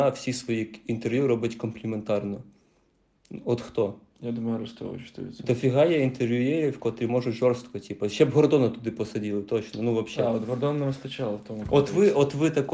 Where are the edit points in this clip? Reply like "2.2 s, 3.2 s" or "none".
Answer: none